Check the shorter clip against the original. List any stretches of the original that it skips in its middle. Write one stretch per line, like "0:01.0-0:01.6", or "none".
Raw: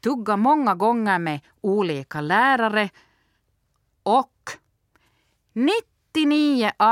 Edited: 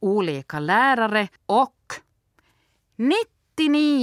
0:03.0-0:03.9